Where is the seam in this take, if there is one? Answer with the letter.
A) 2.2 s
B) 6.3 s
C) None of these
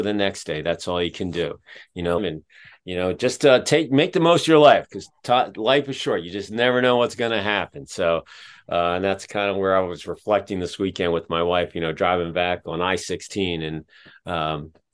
A